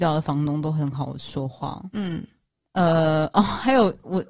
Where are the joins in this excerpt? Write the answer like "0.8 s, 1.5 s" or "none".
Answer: none